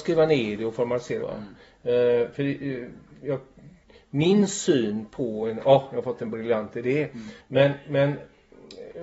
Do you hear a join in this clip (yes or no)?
yes